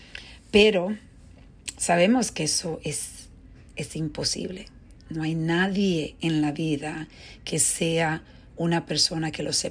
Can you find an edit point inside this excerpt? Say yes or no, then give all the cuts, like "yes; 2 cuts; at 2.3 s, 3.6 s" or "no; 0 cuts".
no; 0 cuts